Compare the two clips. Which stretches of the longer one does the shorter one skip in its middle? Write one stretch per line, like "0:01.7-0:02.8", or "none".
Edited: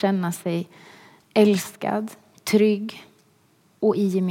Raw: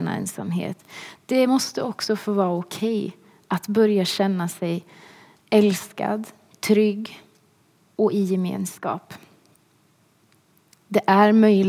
none